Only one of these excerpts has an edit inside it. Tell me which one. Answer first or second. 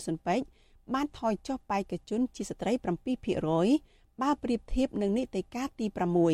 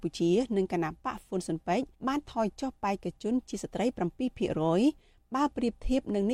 second